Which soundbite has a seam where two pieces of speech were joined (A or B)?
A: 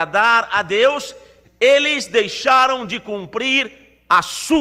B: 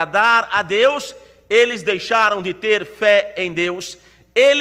A